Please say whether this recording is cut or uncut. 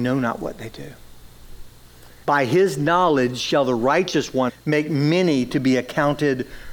cut